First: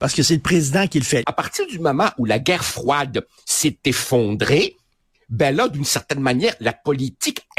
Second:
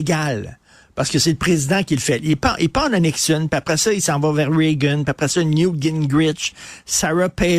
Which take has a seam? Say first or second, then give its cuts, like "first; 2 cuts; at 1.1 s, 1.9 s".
first; 1 cut; at 1.2 s